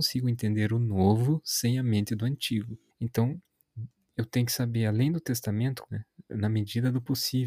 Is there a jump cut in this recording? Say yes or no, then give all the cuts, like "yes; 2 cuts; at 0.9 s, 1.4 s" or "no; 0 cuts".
yes; 2 cuts; at 2.9 s, 5.9 s